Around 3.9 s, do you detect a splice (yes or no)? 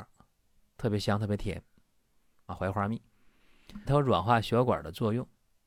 yes